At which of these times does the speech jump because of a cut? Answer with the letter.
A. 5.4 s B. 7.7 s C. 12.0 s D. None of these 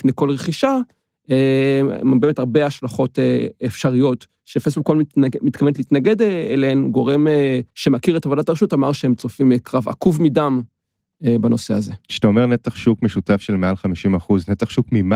B